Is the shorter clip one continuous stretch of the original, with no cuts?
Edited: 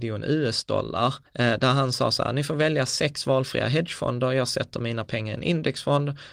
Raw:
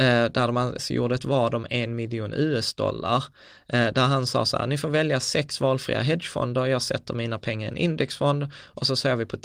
no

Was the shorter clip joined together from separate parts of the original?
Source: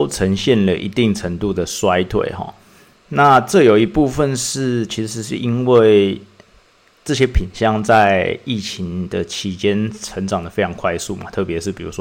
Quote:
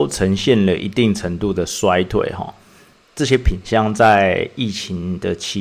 yes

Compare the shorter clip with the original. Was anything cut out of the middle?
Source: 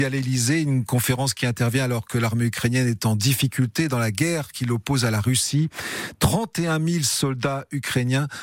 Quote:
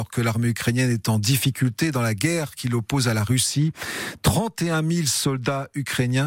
no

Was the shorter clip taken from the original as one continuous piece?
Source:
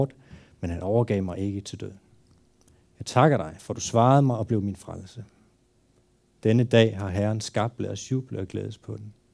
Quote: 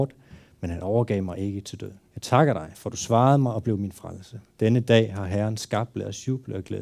no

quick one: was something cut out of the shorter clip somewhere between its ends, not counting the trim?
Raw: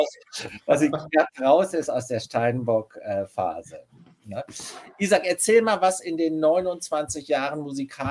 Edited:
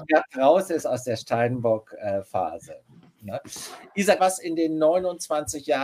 yes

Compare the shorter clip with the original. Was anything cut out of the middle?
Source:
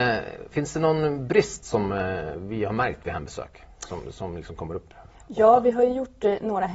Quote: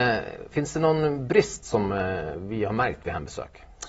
no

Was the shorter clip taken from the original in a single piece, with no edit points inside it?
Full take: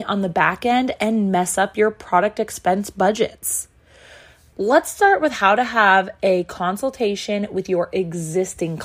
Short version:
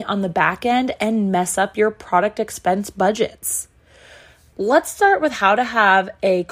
yes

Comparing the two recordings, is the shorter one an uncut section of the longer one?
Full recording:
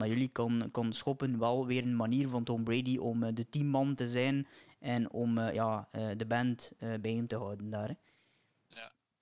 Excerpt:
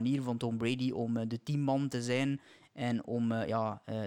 yes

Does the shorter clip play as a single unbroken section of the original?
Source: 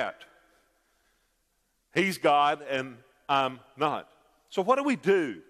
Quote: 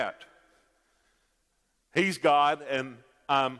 yes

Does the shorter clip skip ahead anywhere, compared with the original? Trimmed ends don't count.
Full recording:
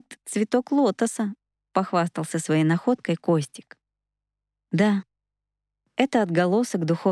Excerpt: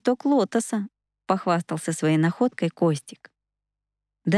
no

